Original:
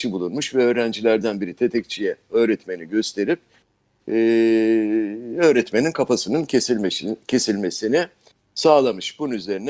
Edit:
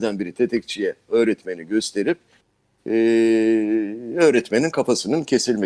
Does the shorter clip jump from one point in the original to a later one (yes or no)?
no